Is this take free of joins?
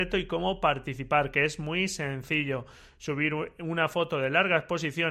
yes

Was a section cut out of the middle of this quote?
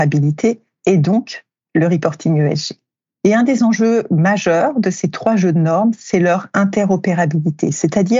no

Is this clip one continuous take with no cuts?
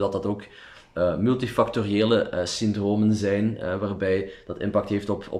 yes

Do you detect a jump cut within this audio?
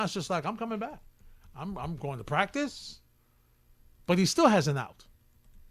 no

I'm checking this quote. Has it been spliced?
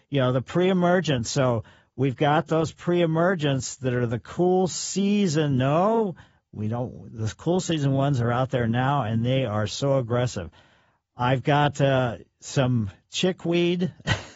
no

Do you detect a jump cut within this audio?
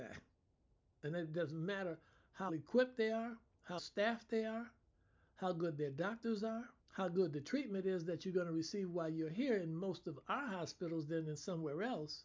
yes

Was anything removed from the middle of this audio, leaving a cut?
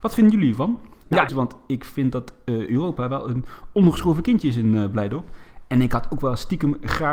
yes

